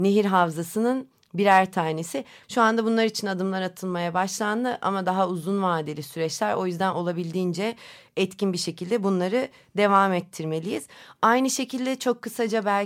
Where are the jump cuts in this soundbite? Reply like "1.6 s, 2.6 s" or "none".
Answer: 2.4 s

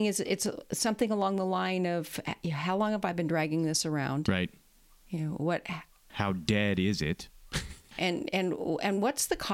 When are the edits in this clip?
6.1 s, 7.9 s

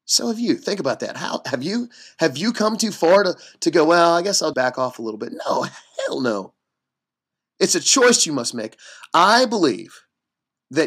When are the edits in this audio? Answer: 4.5 s

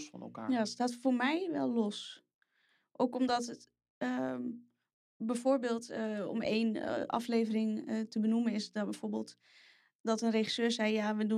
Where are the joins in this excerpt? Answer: none

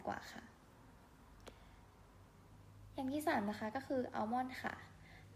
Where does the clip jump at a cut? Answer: none

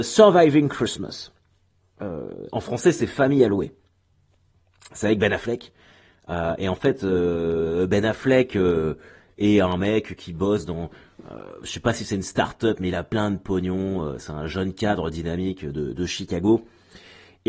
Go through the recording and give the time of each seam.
none

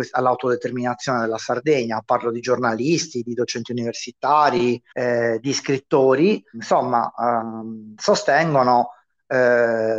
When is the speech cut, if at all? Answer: 4.9 s, 6.5 s

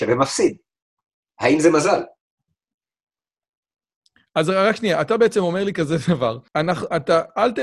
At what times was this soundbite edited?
6.5 s

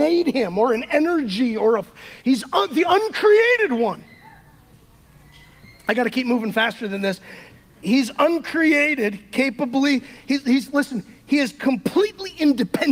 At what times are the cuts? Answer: 2.2 s

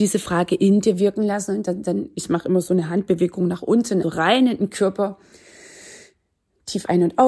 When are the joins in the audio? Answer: 4.0 s

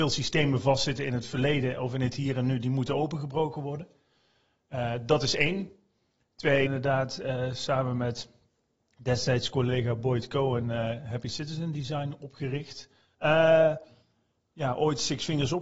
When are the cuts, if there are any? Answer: 6.6 s, 13.1 s

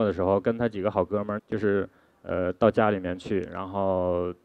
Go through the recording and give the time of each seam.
1.4 s

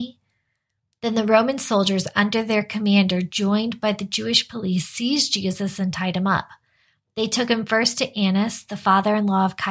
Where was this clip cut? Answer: none

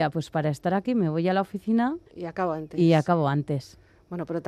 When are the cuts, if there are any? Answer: 2.1 s

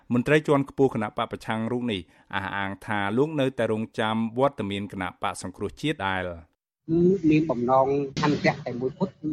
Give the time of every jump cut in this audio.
6.0 s

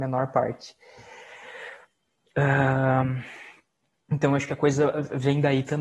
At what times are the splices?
none

